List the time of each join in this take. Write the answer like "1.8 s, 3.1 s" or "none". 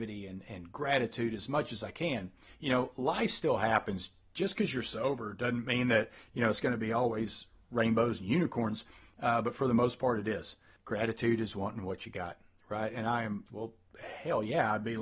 10.8 s, 13.5 s